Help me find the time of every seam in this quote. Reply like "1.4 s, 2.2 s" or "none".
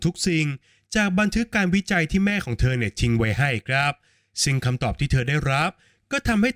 none